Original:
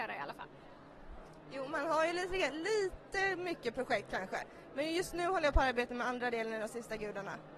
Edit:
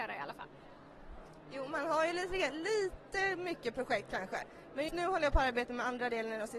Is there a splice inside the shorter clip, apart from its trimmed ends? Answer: yes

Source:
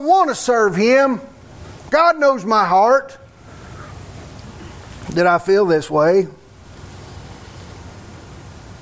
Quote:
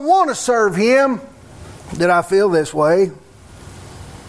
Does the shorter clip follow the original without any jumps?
no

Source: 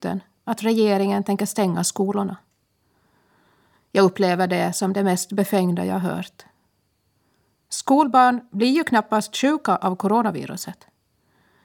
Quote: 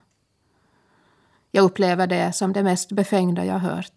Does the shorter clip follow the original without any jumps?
yes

